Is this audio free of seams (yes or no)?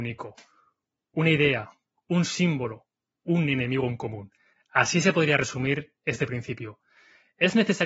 yes